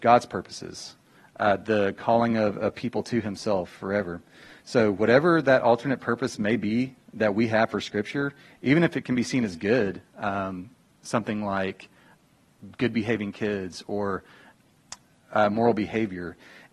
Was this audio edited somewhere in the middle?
no; 0 cuts

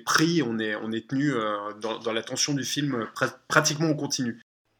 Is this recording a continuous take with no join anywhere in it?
yes; 0 cuts

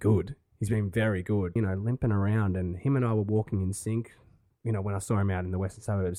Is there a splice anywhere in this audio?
yes; 1 cut; at 1.6 s

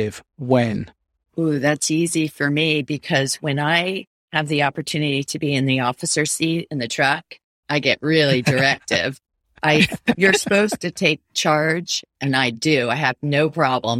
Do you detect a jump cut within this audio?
no; 0 cuts

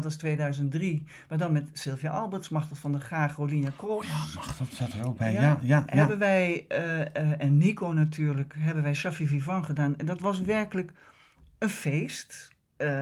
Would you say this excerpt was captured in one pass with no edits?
yes; 0 cuts

